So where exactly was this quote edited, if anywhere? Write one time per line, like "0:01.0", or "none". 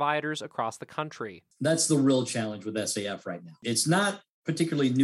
none